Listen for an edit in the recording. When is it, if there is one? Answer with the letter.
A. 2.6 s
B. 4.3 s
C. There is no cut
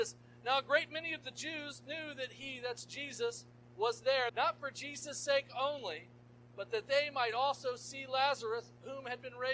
B